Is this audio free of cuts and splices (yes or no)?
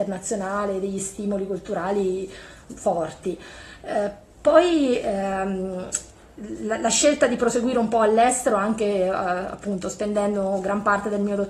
yes